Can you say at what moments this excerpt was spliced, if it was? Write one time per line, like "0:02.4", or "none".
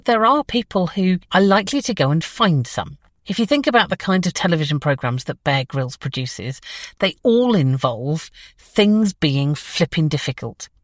0:01.3
0:03.2

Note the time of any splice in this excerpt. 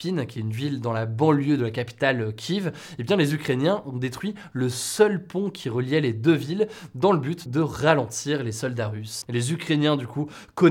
0:07.5
0:09.2

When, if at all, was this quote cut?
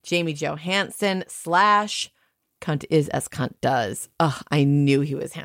none

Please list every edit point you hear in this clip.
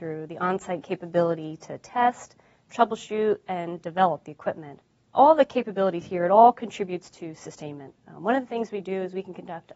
none

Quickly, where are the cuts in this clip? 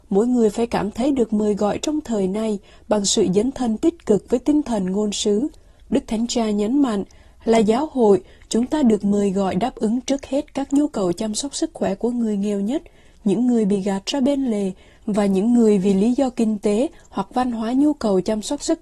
0:05.8

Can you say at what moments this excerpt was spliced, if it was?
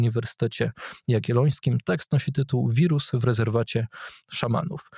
none

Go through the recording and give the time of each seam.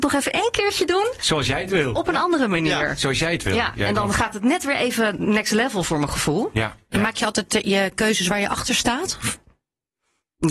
none

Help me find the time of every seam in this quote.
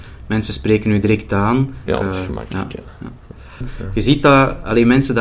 0:01.9
0:03.6

